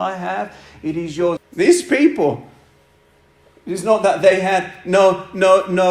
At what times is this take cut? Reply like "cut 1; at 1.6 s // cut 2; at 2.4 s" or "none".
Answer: cut 1; at 1.4 s

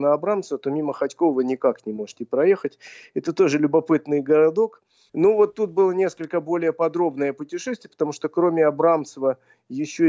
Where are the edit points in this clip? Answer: cut 1; at 5.1 s

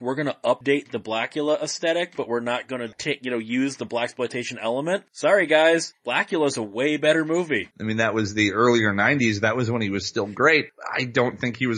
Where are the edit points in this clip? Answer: cut 1; at 7.7 s

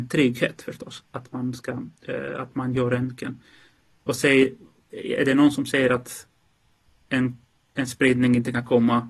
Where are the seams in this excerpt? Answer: cut 1; at 4.0 s

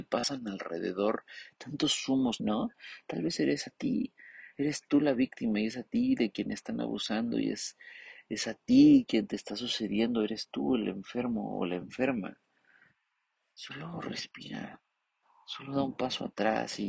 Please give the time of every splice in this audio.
cut 1; at 2.4 s

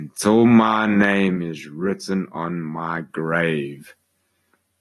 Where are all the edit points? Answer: none

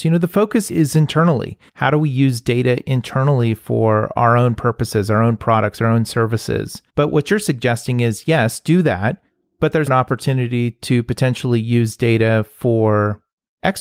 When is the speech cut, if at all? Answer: cut 1; at 1.7 s // cut 2; at 6.9 s // cut 3; at 9.9 s

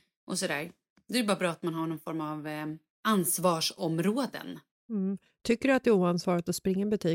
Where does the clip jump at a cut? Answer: none

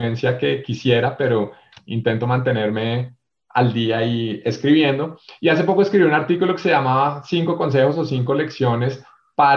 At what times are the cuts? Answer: none

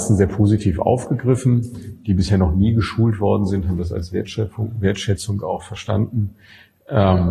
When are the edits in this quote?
none

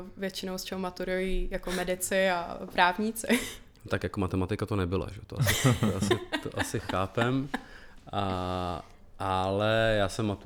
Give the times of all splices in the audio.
none

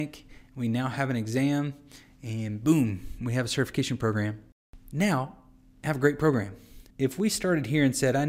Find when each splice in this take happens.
cut 1; at 6.9 s

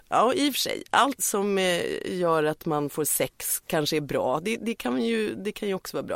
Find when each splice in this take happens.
cut 1; at 1.2 s

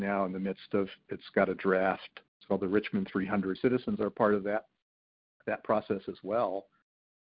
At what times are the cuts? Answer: cut 1; at 2.3 s // cut 2; at 3.6 s

